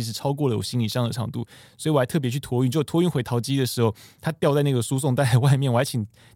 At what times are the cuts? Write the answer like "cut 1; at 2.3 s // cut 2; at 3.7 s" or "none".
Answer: none